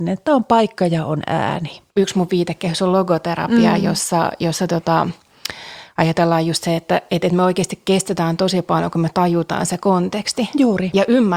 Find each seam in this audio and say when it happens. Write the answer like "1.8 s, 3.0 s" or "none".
1.9 s

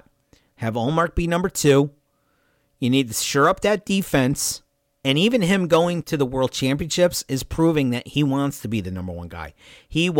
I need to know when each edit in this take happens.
5.0 s, 6.0 s

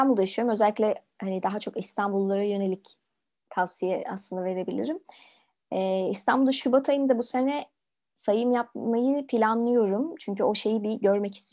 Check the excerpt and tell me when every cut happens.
none

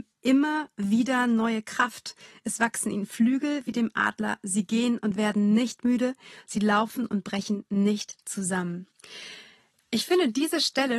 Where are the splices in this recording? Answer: none

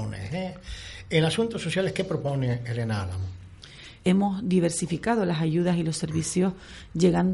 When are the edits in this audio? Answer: 4.0 s

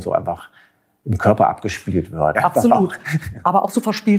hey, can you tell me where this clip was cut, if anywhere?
2.4 s

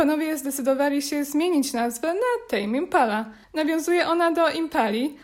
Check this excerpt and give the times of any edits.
none

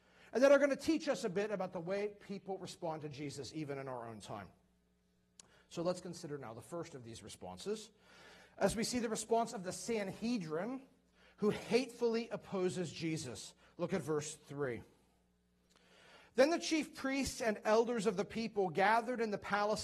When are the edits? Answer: none

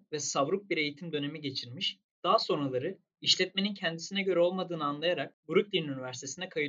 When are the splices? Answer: 2.1 s

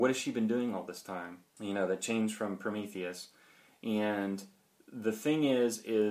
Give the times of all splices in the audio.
1.6 s

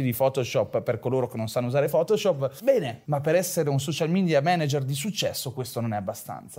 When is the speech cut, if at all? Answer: 3.0 s

